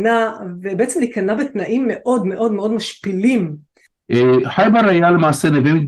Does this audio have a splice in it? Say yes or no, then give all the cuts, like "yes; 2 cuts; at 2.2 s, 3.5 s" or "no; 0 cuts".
no; 0 cuts